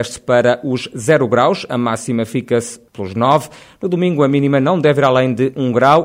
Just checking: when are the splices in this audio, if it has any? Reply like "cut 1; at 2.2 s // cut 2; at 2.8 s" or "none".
cut 1; at 2.9 s